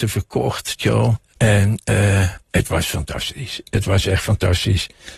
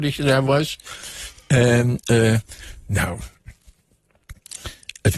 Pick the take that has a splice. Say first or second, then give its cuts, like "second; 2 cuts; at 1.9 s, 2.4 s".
first; 2 cuts; at 1.4 s, 2.4 s